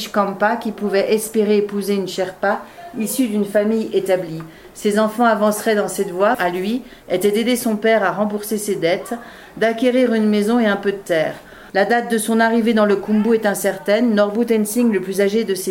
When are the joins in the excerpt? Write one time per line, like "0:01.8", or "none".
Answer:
0:06.3
0:11.7